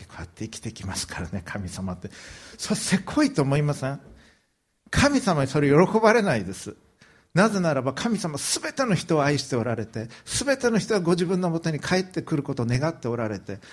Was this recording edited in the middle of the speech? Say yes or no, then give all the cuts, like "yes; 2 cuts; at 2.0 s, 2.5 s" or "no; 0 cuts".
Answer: no; 0 cuts